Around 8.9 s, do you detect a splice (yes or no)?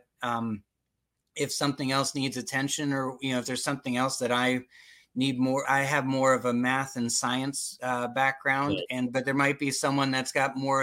no